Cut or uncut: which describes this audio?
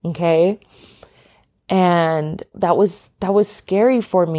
cut